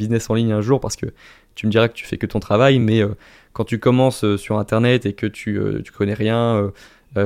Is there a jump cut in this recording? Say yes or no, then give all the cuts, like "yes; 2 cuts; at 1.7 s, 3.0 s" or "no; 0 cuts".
no; 0 cuts